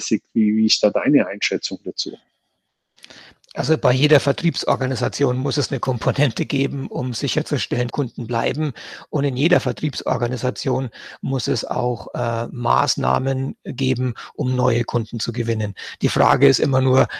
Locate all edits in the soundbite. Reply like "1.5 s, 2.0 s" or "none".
7.9 s